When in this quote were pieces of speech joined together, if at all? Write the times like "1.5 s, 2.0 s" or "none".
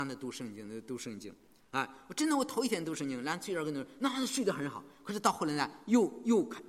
none